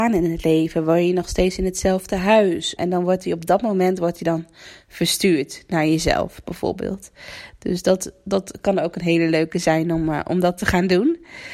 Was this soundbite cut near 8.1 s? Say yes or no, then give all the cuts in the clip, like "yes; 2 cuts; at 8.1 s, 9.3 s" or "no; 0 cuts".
no; 1 cut; at 2.8 s